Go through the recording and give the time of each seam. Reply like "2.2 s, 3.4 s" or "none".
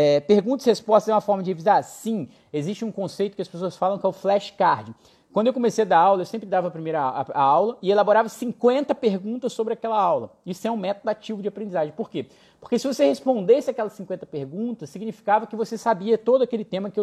none